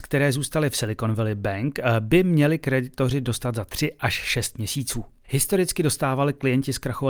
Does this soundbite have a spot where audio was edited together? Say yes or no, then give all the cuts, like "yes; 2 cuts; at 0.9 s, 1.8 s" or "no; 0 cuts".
yes; 1 cut; at 5.2 s